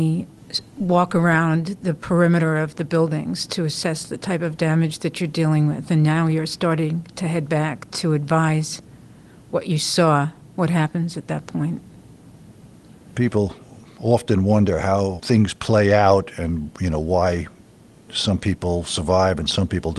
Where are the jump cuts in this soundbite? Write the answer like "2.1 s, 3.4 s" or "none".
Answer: none

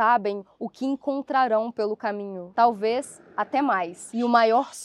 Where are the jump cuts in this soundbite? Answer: 2.5 s

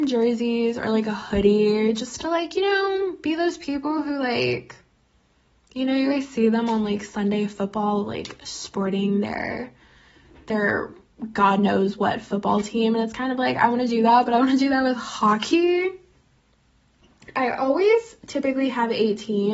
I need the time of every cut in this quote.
none

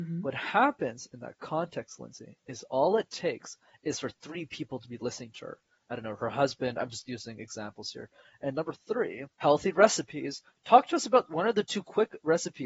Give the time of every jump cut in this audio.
8.2 s, 9.3 s

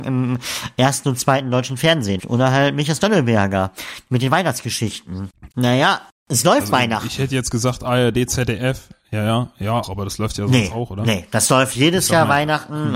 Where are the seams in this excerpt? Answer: 2.2 s, 5.5 s, 9.8 s

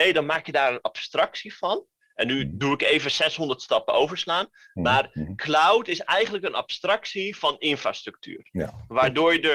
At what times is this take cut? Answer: none

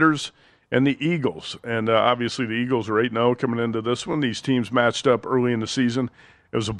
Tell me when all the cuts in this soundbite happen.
none

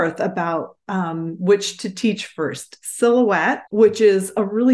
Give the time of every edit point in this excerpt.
3.7 s

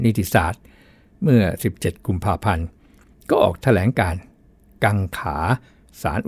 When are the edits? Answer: none

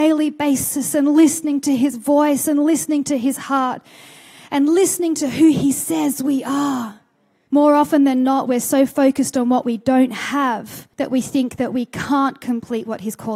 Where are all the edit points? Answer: 7.5 s, 10.9 s

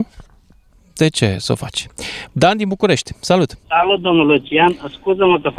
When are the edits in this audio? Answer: 2.3 s, 3.6 s

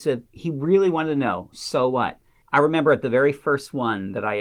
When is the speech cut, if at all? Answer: 2.4 s

